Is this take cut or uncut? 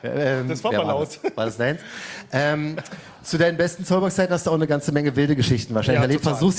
uncut